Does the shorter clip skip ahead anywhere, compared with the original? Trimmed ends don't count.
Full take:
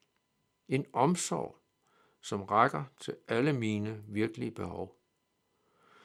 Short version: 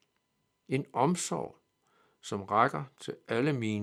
no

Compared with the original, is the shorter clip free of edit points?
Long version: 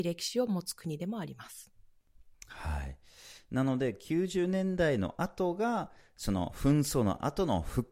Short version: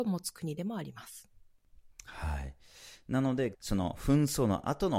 no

